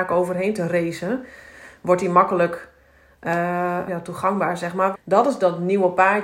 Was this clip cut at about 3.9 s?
yes; 2 cuts; at 3.9 s, 4.9 s

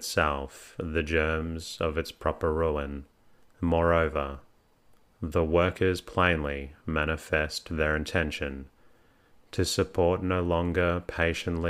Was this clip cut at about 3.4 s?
yes; 1 cut; at 3.4 s

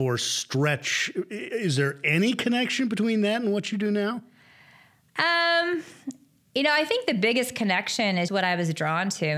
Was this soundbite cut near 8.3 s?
yes; 1 cut; at 8.3 s

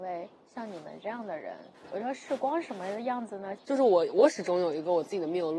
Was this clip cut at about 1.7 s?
yes; 2 cuts; at 1.7 s, 3.6 s

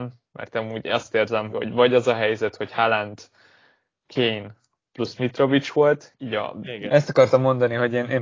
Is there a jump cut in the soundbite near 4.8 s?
no; 2 cuts; at 1.5 s, 6.9 s

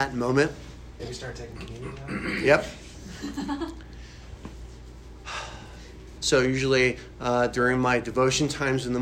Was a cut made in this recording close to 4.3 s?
no; 2 cuts; at 1.0 s, 6.2 s

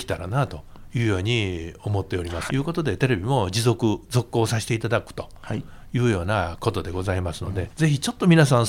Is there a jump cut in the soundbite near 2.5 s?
yes; 2 cuts; at 2.5 s, 7.7 s

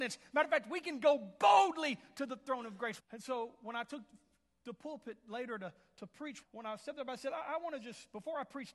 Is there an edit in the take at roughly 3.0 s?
yes; 2 cuts; at 3.0 s, 6.4 s

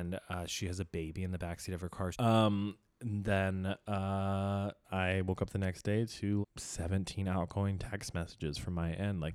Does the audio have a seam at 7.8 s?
no; 3 cuts; at 2.1 s, 4.8 s, 6.4 s

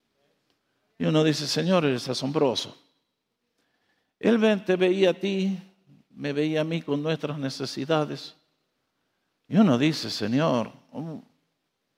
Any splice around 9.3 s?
yes; 1 cut; at 9.3 s

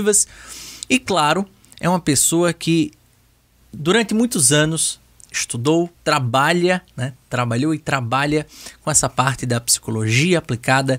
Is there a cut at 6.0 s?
yes; 1 cut; at 6.0 s

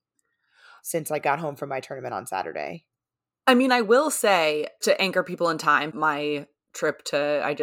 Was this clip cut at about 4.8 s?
yes; 2 cuts; at 4.8 s, 5.9 s

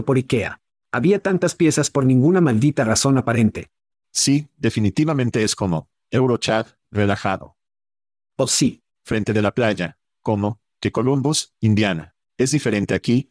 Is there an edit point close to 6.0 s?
no; 3 cuts; at 3.9 s, 8.9 s, 12.3 s

